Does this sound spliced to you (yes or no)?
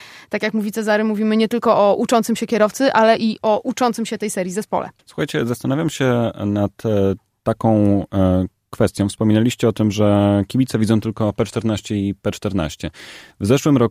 yes